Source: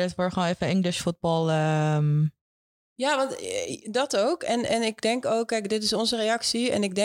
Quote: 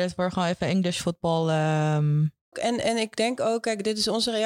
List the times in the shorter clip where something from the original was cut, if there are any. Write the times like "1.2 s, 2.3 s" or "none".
2.5 s